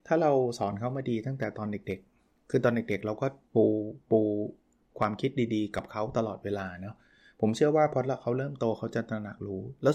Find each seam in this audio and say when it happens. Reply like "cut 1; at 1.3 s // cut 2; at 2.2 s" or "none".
none